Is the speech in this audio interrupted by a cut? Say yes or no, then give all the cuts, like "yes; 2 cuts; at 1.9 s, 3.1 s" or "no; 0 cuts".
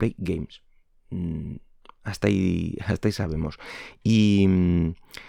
no; 0 cuts